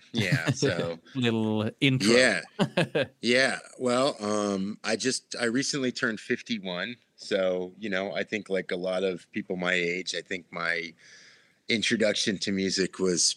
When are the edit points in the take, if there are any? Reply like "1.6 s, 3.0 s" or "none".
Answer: 1.1 s